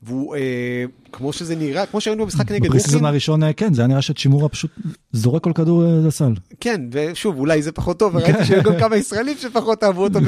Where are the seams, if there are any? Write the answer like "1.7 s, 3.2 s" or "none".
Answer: none